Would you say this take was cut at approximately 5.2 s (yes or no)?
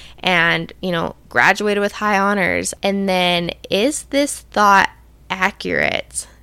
no